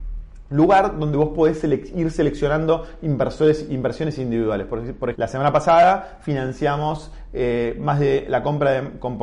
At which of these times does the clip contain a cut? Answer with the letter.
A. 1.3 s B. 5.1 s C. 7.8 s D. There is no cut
B